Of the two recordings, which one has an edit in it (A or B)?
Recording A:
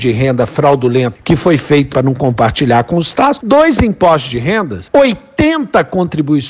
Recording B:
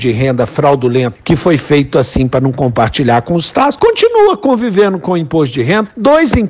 A